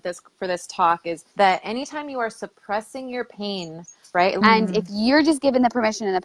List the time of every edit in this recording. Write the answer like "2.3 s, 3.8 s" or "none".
1.3 s, 4.4 s